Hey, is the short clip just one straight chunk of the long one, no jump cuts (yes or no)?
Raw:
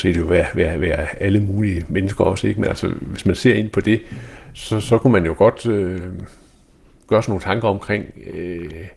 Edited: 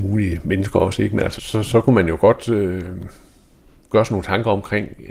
no